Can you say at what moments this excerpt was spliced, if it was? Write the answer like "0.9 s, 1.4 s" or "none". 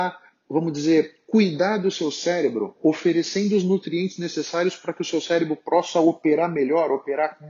none